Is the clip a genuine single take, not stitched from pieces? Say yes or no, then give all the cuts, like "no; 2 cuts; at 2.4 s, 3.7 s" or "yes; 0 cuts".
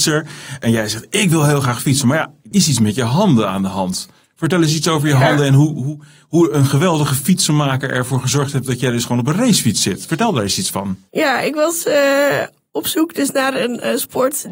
no; 1 cut; at 2.5 s